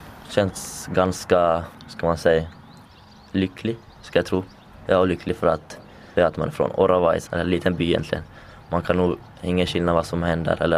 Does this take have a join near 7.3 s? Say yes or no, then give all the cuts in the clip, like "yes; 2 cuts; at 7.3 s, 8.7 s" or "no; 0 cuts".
yes; 2 cuts; at 6.2 s, 7.3 s